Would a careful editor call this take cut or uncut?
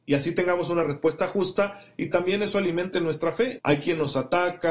cut